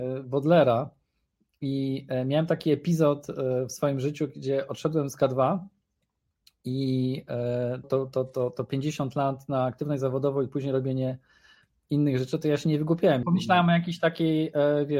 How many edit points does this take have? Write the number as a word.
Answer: two